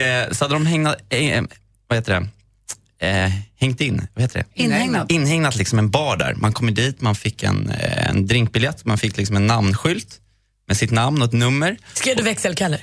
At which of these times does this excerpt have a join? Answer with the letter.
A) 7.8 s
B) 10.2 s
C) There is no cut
C